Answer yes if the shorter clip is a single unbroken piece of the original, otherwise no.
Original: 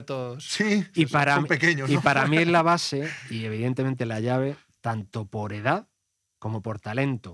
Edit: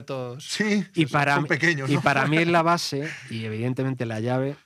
yes